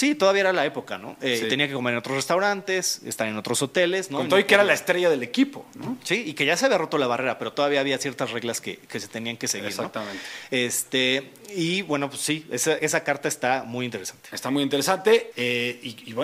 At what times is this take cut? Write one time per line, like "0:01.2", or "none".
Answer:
0:12.8
0:15.3